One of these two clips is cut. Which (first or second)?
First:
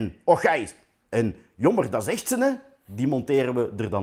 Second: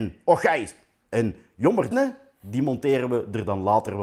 second